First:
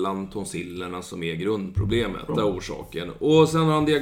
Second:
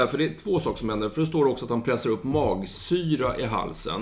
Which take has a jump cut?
first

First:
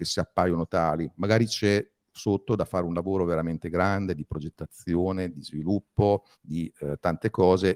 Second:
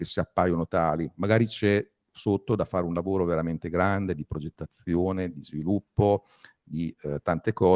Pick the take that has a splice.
first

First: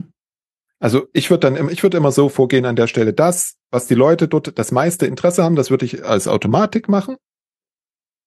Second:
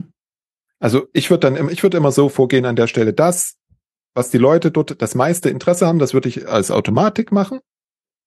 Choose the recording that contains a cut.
first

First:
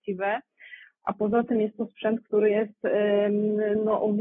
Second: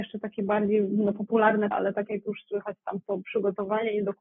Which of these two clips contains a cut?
second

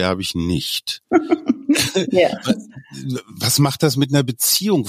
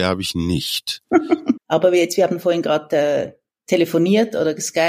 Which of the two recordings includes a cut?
second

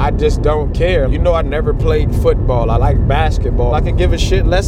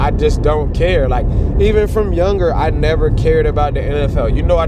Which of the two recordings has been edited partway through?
first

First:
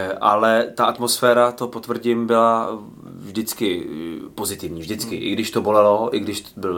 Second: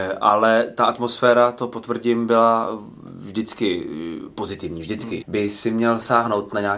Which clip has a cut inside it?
second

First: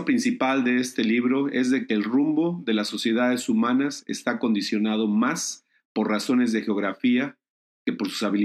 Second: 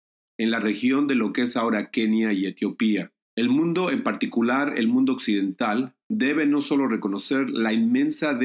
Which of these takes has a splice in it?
second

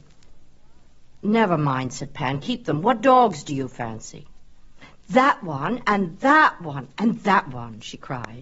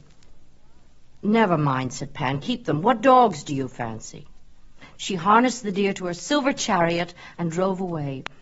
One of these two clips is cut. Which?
second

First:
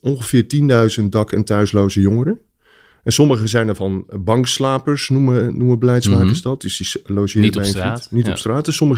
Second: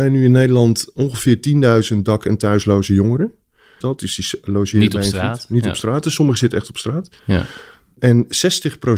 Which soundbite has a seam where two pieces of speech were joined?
second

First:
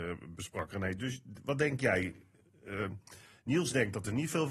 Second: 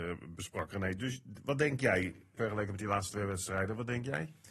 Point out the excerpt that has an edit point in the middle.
second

